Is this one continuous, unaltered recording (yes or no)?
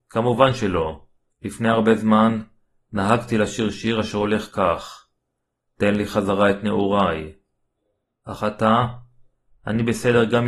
no